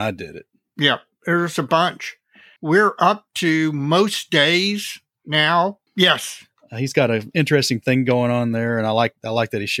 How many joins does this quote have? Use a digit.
2